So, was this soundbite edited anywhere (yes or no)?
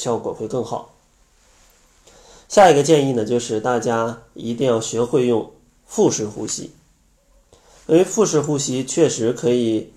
no